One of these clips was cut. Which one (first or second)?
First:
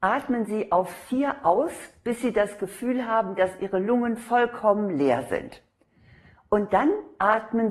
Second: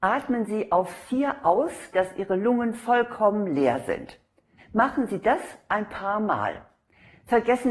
second